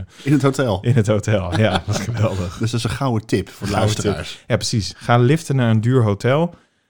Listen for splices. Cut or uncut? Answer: uncut